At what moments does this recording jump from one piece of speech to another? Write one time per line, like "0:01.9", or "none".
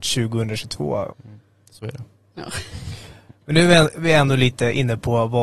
0:01.1